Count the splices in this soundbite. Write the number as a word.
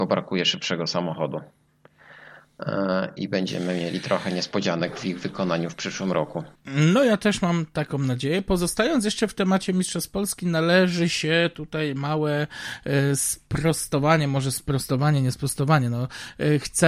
one